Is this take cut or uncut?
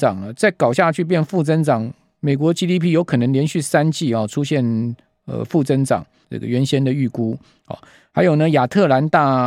cut